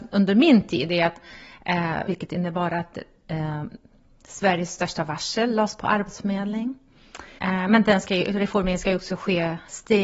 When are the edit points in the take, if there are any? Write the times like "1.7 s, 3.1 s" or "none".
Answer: 2.1 s, 7.4 s